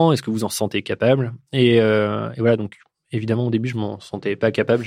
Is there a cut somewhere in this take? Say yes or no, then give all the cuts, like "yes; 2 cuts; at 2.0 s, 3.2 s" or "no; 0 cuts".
no; 0 cuts